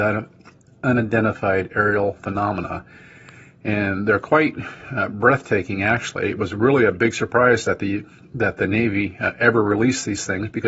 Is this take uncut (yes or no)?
yes